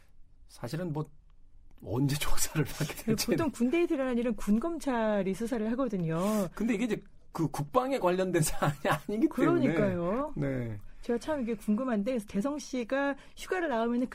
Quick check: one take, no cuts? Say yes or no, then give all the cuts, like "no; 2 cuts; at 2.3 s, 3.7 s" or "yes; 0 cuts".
yes; 0 cuts